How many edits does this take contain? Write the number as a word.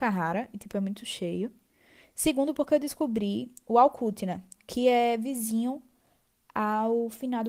zero